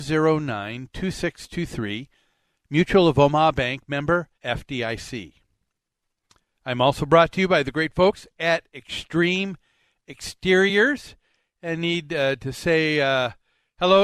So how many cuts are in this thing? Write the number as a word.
one